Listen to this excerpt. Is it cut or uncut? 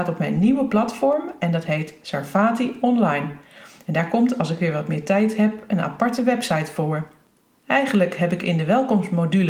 uncut